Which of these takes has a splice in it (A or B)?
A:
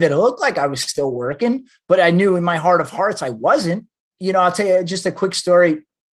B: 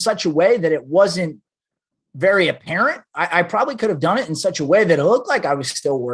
A